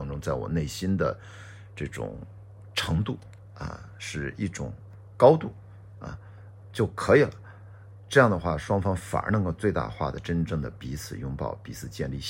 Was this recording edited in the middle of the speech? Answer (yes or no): no